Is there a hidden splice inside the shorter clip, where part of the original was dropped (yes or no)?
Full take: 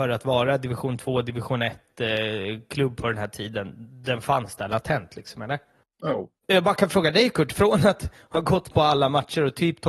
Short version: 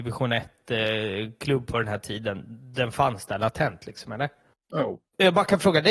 no